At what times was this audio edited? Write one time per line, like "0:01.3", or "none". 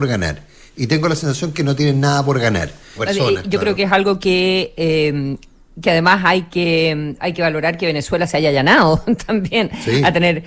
0:03.0